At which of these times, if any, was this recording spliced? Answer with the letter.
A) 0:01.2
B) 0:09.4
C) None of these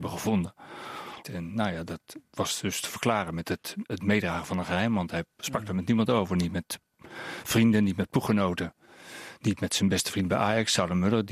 A